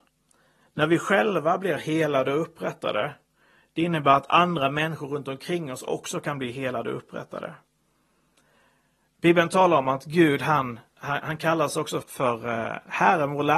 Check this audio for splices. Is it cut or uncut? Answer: cut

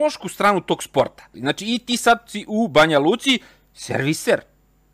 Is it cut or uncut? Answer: cut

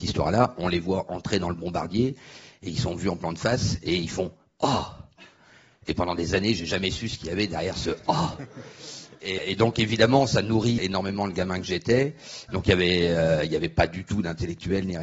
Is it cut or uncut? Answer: cut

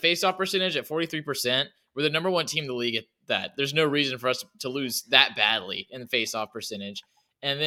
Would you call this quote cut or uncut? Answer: uncut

